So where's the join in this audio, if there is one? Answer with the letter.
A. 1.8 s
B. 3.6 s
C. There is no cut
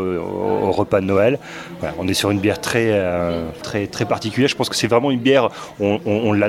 B